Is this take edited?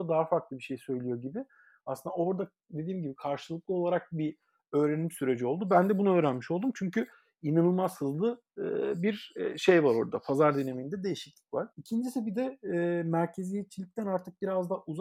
yes; 1 cut; at 11.7 s

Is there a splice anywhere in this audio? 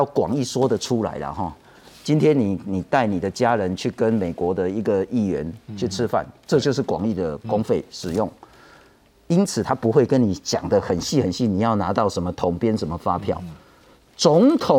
no; 0 cuts

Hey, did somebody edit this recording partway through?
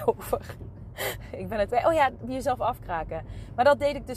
yes; 1 cut; at 1.7 s

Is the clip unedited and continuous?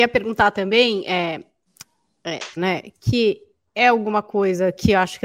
no; 1 cut; at 2.6 s

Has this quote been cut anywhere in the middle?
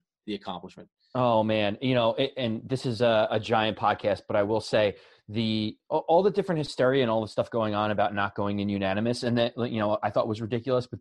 no; 0 cuts

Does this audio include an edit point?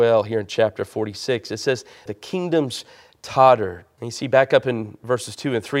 yes; 2 cuts; at 2.1 s, 4.0 s

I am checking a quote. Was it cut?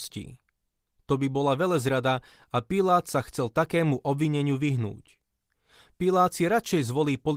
no; 0 cuts

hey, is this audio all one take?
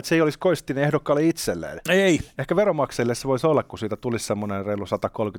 yes; 0 cuts

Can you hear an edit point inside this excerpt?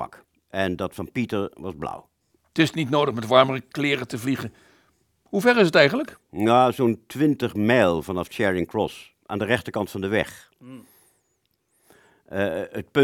no; 0 cuts

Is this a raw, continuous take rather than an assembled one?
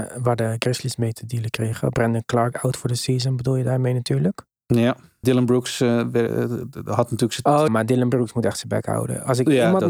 no; 2 cuts; at 5.2 s, 7.7 s

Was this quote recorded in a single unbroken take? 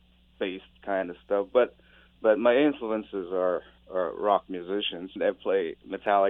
no; 1 cut; at 5.2 s

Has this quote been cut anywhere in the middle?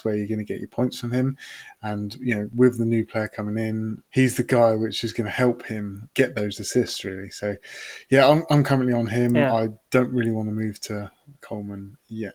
no; 0 cuts

